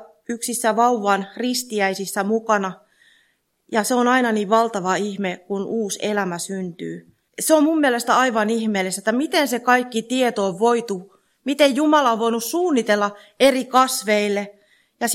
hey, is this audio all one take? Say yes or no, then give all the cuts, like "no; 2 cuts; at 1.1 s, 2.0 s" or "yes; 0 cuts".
no; 1 cut; at 7.3 s